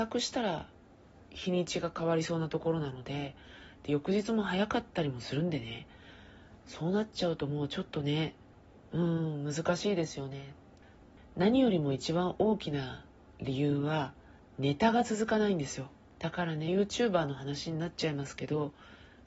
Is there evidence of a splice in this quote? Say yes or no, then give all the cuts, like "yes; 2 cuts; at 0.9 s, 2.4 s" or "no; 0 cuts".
no; 0 cuts